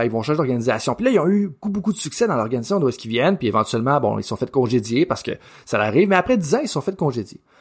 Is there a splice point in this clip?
yes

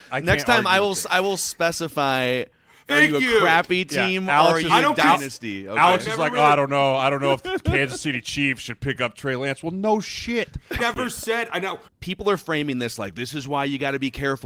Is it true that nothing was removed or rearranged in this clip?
no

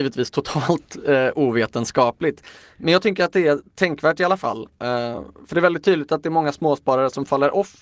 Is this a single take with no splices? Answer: yes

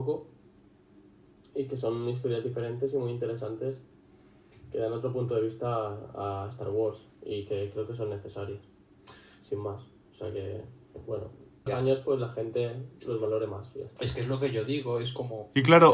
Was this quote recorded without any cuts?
no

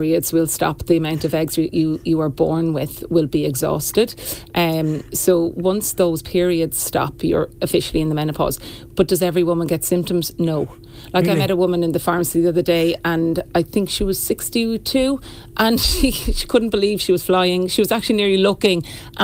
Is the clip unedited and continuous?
yes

